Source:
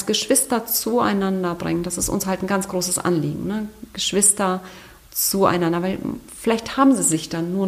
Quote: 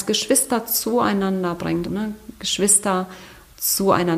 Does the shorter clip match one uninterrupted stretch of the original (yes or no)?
no